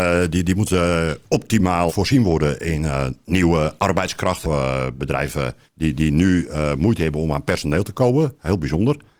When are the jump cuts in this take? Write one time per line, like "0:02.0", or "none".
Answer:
0:01.9
0:04.4
0:05.7